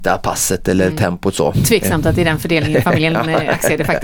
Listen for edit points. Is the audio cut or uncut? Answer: uncut